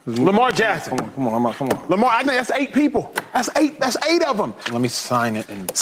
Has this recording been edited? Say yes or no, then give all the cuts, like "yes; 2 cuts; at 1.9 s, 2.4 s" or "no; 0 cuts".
yes; 2 cuts; at 2.2 s, 4.6 s